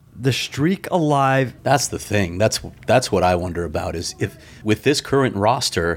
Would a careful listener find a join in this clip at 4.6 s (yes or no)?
yes